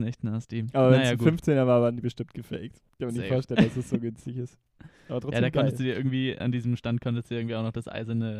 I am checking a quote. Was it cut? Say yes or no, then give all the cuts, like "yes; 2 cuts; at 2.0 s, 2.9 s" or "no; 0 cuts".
yes; 2 cuts; at 2.9 s, 6.4 s